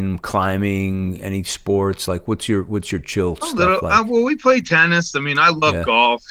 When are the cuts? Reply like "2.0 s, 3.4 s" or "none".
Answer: none